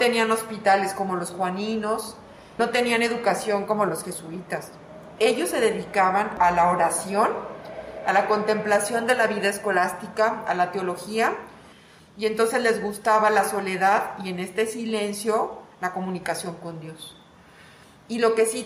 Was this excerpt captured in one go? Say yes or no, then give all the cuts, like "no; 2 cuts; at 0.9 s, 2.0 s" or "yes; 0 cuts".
yes; 0 cuts